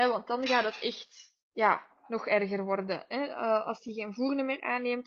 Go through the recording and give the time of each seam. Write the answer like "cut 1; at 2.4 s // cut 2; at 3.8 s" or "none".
cut 1; at 1.4 s